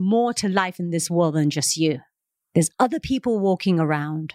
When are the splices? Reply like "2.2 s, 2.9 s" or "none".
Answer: none